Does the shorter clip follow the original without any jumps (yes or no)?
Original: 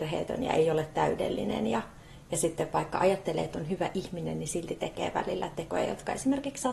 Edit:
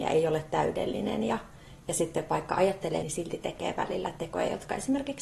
no